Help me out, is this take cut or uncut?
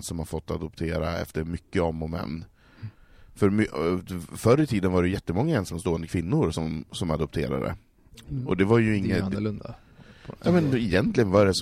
uncut